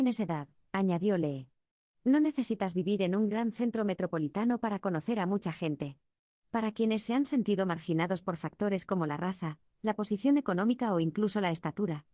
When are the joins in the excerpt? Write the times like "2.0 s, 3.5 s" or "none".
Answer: none